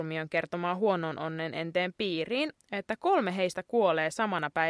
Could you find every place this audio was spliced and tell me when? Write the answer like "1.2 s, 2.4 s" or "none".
2.5 s